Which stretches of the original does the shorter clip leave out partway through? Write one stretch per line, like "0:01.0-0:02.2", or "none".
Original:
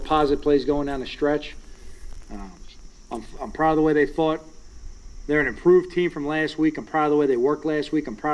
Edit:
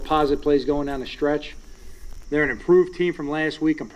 0:02.3-0:05.2